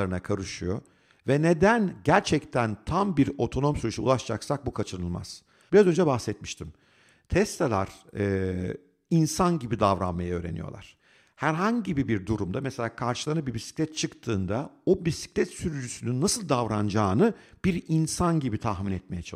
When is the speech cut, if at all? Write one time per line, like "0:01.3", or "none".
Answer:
0:05.7